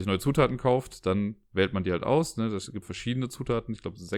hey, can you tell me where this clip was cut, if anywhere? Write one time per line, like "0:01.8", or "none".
0:02.8